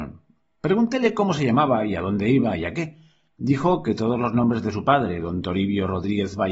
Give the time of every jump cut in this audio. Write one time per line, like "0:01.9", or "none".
none